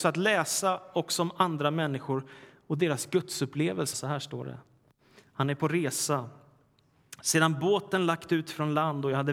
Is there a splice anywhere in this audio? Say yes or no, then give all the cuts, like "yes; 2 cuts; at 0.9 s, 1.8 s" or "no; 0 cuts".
yes; 1 cut; at 3.9 s